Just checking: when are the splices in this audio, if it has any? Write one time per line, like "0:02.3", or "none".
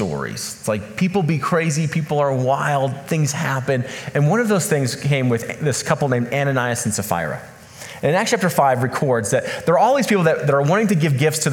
none